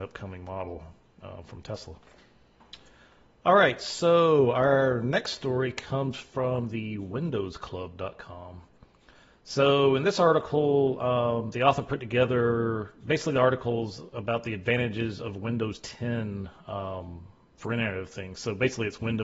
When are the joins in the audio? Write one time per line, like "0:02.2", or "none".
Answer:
none